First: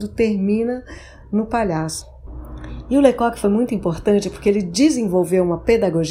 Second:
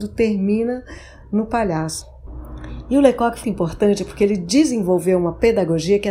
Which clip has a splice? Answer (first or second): second